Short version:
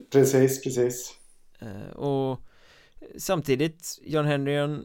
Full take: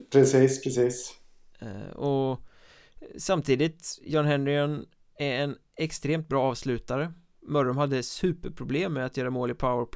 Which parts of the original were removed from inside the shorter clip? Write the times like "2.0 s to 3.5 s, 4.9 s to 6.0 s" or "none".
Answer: none